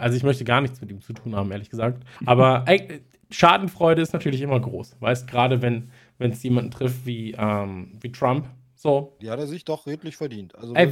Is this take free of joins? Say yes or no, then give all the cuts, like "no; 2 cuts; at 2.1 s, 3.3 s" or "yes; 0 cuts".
no; 2 cuts; at 2.2 s, 9.2 s